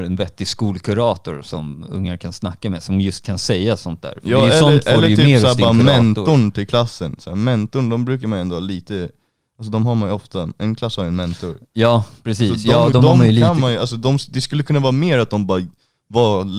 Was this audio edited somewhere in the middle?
no; 0 cuts

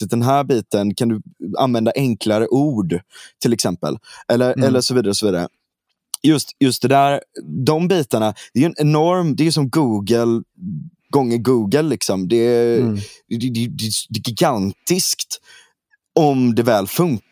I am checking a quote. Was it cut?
no; 0 cuts

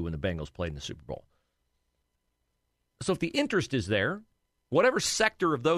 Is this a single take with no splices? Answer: no; 1 cut; at 2.9 s

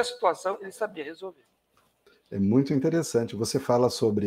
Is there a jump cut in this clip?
no; 0 cuts

